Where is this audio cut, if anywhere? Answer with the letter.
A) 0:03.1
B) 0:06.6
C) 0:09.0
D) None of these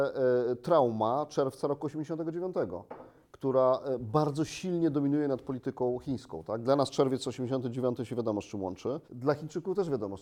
C